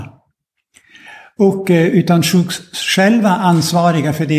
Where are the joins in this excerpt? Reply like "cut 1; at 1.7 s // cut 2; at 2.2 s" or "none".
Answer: none